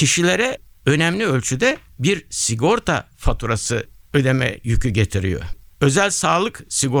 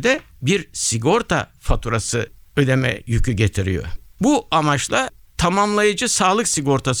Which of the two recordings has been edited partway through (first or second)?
second